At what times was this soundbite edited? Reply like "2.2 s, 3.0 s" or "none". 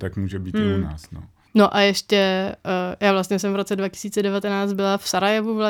1.5 s